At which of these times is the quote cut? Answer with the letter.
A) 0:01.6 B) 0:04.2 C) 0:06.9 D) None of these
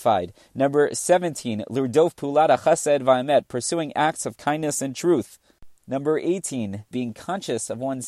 C